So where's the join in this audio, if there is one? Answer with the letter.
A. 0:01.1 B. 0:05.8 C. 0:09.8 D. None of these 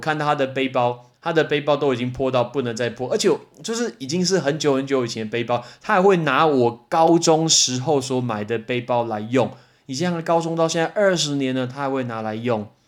A